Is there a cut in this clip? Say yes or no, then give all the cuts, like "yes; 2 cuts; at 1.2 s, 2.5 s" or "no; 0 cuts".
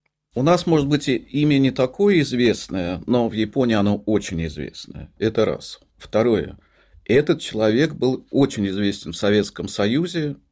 yes; 1 cut; at 5.9 s